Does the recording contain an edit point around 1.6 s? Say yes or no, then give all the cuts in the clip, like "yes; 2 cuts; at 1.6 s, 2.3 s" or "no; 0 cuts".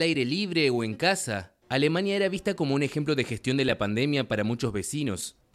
yes; 1 cut; at 1.6 s